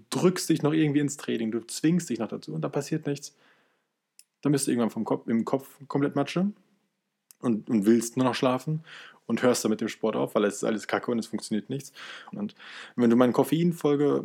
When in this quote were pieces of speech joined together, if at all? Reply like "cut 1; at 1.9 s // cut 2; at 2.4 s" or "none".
cut 1; at 12.3 s